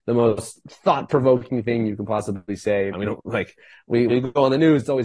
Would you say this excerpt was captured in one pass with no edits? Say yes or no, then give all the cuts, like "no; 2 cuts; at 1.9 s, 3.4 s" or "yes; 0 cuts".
no; 2 cuts; at 2.9 s, 4.1 s